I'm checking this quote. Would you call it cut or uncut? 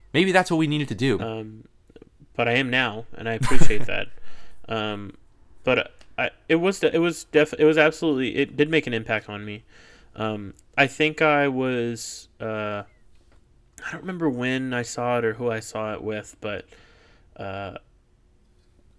cut